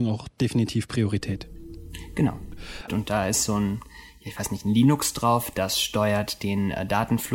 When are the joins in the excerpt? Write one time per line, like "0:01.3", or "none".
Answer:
0:02.9